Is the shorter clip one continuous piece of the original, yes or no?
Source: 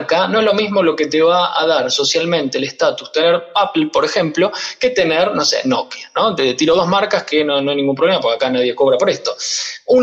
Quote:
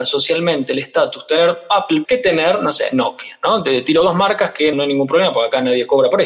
no